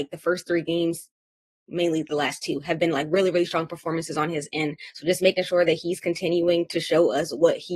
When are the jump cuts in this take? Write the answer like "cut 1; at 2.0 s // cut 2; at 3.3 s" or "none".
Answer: none